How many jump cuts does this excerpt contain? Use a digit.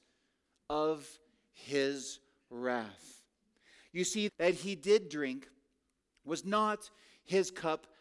1